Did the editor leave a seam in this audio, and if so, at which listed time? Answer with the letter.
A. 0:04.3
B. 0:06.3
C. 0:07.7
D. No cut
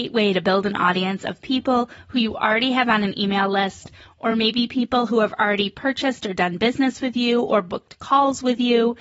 D